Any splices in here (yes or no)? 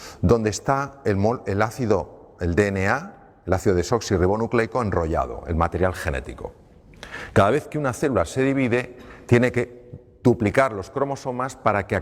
no